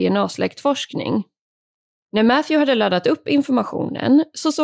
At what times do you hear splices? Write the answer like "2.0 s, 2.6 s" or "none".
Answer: 2.0 s